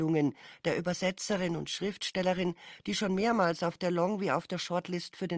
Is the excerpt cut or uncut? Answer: uncut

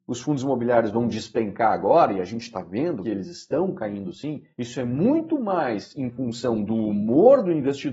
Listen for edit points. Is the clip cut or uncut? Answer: cut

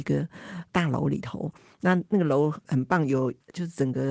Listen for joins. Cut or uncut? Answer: uncut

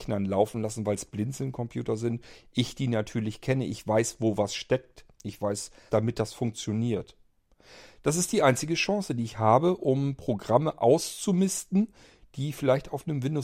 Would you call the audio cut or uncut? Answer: cut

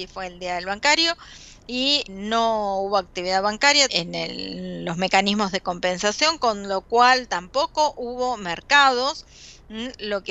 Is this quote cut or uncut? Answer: cut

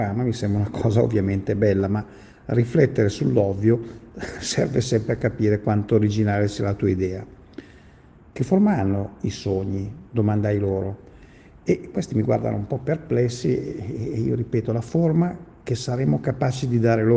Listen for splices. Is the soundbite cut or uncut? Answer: uncut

